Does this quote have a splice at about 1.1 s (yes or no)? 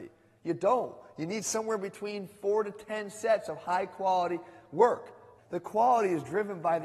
no